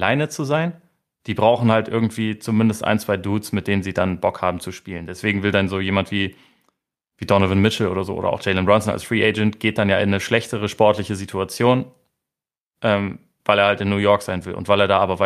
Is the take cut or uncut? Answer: uncut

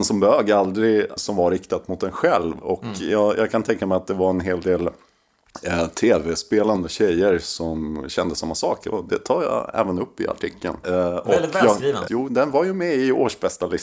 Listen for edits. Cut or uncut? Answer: cut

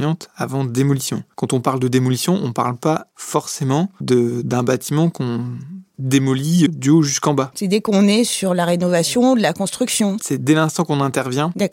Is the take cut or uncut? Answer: cut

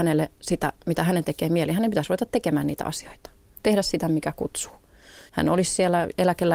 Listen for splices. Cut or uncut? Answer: cut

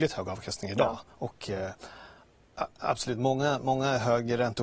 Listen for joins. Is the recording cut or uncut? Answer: uncut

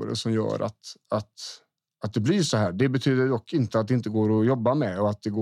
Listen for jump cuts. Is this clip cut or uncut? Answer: uncut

